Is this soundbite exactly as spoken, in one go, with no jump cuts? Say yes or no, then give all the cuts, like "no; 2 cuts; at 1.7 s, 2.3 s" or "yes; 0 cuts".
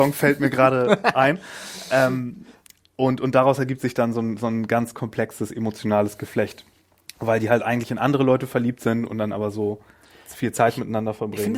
yes; 0 cuts